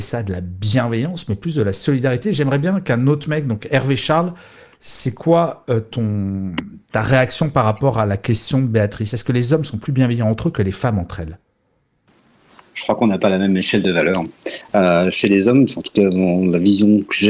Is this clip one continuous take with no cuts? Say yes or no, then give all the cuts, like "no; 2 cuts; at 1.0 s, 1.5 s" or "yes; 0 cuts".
yes; 0 cuts